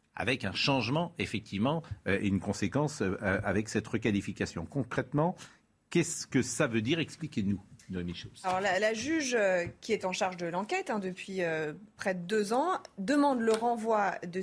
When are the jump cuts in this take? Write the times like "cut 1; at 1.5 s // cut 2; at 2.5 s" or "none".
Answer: none